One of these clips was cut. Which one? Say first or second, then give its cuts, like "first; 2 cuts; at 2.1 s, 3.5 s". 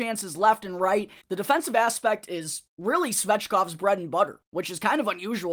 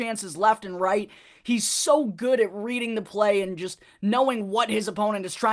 first; 2 cuts; at 1.2 s, 2.7 s